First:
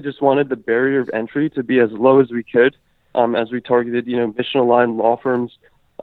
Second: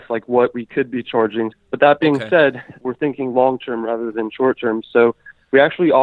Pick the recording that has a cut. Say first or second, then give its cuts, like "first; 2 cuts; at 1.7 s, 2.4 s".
second; 2 cuts; at 1.5 s, 2.8 s